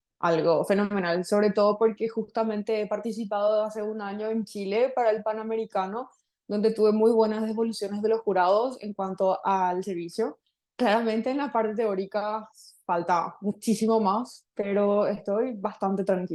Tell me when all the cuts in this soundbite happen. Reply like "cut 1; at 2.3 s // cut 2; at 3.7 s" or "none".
none